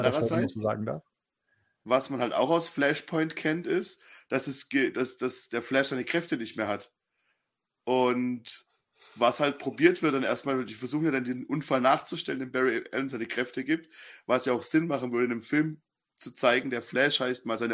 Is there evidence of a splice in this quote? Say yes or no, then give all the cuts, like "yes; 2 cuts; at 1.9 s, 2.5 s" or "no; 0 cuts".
no; 0 cuts